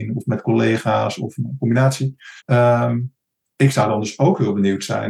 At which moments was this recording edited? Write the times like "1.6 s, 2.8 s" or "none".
2.4 s